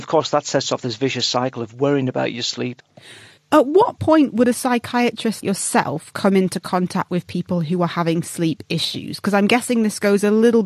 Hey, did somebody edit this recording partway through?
yes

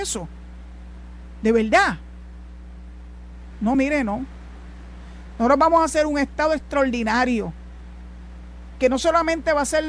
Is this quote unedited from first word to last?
yes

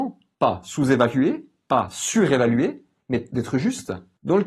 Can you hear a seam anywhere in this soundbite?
no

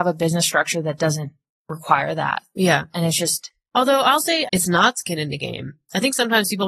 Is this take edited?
yes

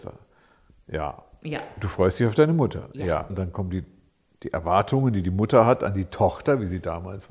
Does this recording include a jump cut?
yes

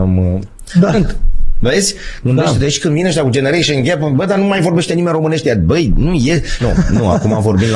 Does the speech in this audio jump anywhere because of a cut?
yes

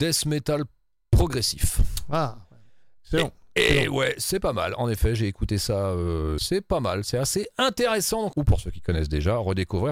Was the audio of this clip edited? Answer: yes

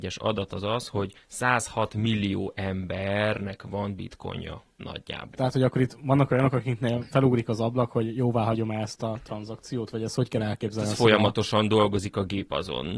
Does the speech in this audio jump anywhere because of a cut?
yes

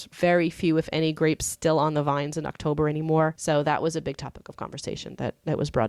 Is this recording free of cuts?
yes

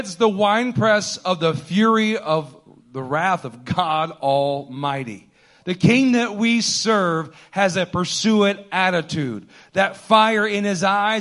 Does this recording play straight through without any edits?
yes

